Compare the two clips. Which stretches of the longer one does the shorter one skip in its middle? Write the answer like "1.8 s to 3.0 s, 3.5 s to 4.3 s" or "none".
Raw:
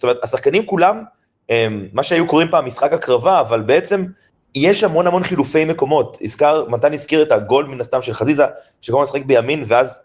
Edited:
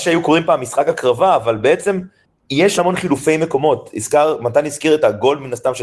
4.8 s to 5.0 s